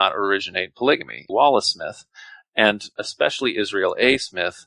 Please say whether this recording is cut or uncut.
cut